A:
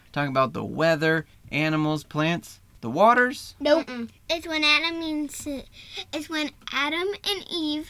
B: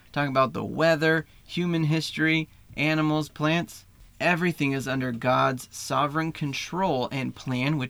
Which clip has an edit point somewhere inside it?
A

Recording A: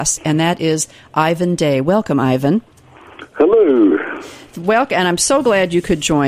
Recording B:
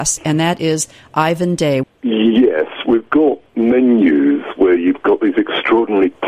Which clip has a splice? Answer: B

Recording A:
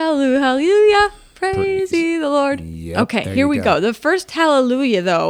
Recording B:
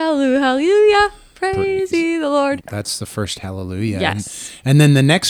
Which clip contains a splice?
B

